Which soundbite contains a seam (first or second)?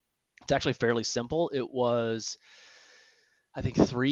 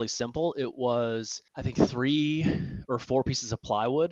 second